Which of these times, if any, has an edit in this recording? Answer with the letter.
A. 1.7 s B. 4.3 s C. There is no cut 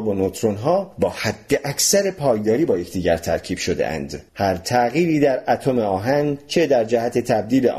B